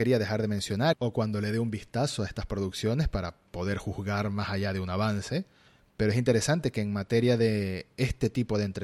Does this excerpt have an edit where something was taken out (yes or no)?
yes